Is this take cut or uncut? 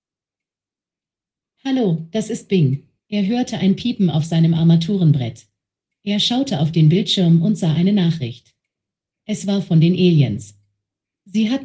cut